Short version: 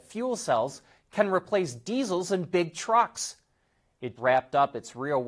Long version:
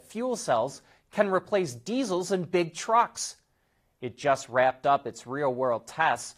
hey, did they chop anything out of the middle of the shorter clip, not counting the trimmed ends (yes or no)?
yes